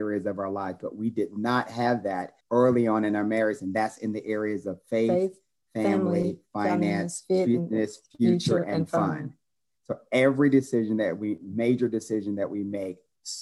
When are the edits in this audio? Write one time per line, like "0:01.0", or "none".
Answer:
0:02.4
0:03.6